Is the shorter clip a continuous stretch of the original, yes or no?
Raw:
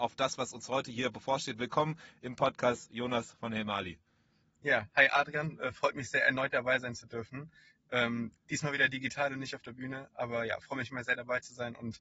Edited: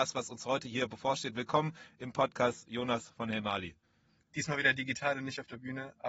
no